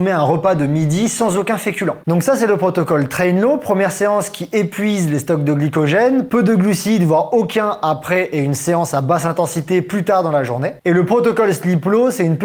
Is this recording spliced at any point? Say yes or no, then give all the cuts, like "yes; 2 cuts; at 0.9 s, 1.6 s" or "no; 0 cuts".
yes; 1 cut; at 2.0 s